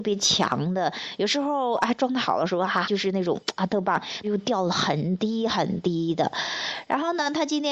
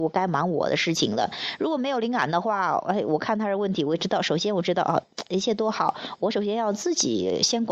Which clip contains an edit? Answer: first; 2 cuts; at 2.8 s, 4.2 s

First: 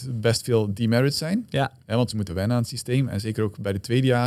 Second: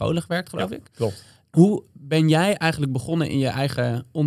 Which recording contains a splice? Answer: first; 1 cut; at 2.3 s

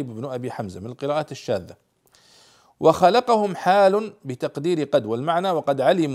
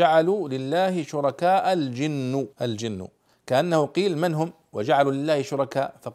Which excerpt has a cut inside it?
second; 1 cut; at 2.5 s

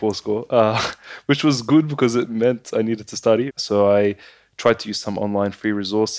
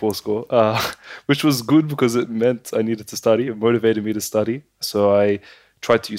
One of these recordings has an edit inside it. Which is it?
first; 1 cut; at 3.5 s

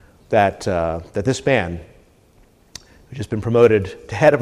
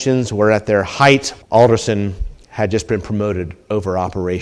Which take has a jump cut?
second; 1 cut; at 1.4 s

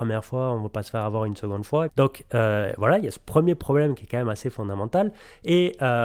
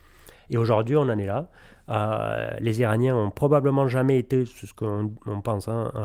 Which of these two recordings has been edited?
first; 1 cut; at 1.9 s

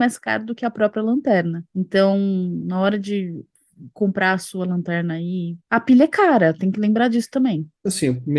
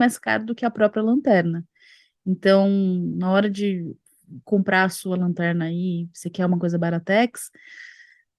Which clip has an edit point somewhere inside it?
first; 2 cuts; at 1.7 s, 5.6 s

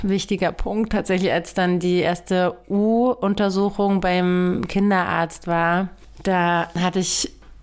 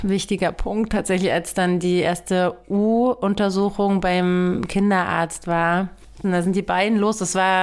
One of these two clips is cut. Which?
second; 1 cut; at 6.2 s

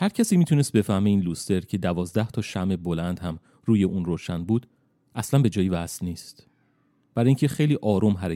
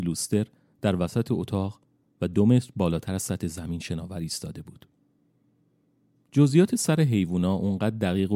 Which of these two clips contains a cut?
second; 1 cut; at 6.2 s

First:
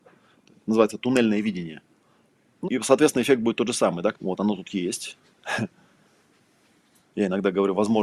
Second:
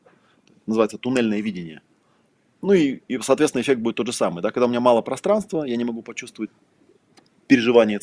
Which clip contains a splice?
first; 2 cuts; at 2.6 s, 4.1 s

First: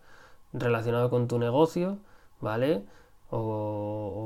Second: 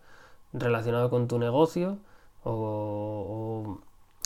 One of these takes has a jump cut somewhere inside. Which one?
second; 1 cut; at 2.3 s

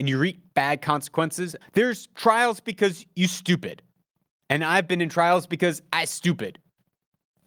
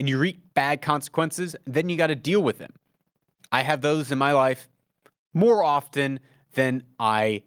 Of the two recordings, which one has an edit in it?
first; 1 cut; at 1.6 s

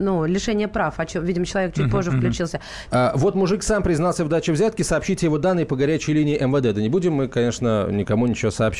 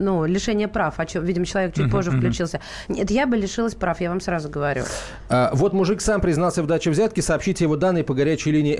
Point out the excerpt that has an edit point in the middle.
first; 1 cut; at 2.9 s

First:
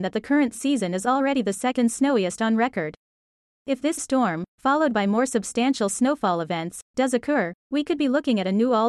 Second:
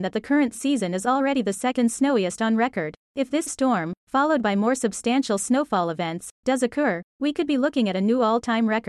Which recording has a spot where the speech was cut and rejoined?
second; 1 cut; at 3.0 s

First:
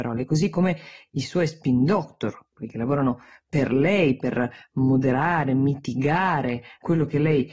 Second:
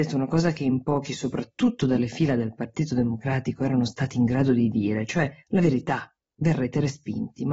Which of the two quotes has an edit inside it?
second; 1 cut; at 5.4 s

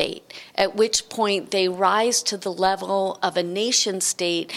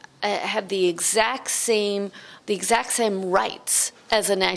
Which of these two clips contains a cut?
second; 1 cut; at 2.4 s

